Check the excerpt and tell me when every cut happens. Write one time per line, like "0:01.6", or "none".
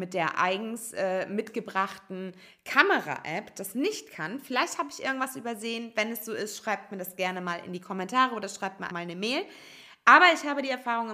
0:08.9